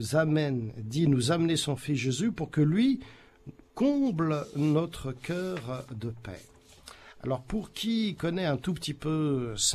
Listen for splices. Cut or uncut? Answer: uncut